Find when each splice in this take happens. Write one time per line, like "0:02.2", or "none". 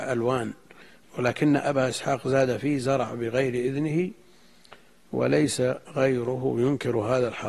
0:01.0